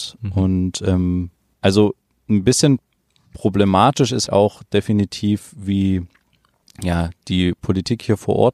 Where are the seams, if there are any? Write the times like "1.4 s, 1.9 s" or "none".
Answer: 1.5 s, 4.3 s